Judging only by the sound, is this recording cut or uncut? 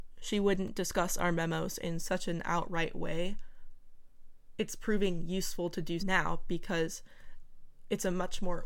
cut